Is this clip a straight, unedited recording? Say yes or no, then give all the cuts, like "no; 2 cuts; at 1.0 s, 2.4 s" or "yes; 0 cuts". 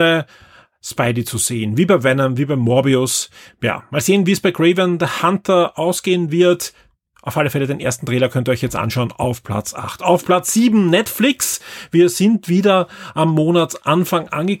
yes; 0 cuts